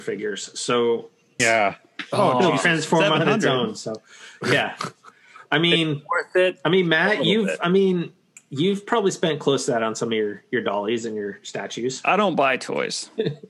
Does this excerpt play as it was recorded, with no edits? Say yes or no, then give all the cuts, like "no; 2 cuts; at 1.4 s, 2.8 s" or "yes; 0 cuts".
no; 1 cut; at 1.4 s